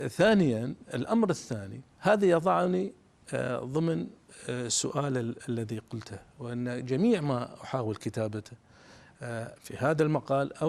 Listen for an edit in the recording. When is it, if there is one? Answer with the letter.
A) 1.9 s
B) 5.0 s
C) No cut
A